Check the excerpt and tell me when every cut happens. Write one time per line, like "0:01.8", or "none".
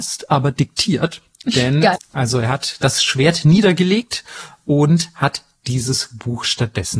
0:02.0

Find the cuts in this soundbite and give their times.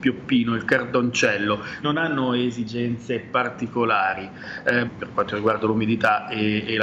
0:01.8
0:04.9

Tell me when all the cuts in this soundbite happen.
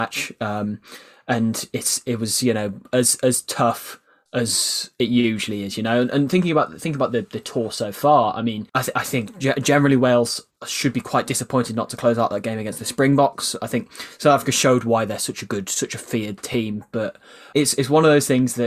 0:08.7
0:17.5

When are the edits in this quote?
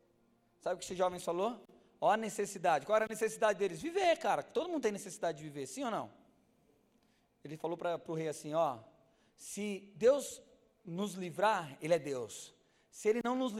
none

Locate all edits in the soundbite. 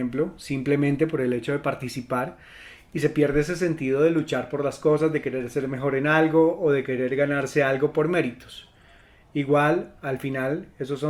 none

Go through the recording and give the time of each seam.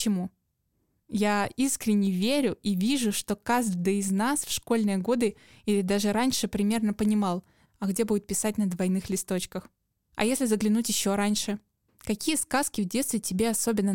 0:07.7

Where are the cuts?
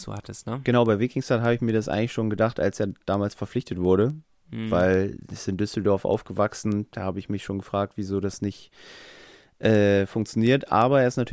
none

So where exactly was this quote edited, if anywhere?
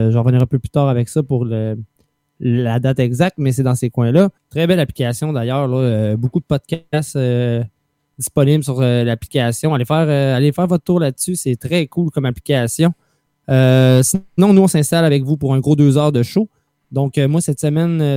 0:04.4

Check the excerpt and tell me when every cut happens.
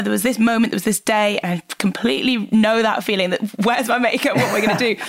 none

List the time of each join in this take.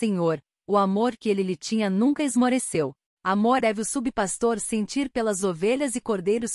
0:03.6

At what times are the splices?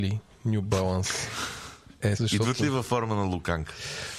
0:02.2

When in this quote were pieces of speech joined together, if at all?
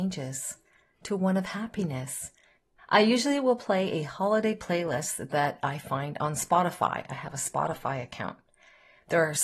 0:02.8

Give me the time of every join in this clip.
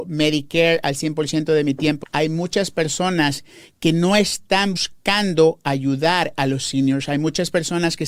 0:02.0
0:04.8

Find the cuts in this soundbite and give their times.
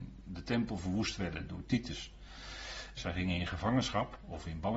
0:03.0

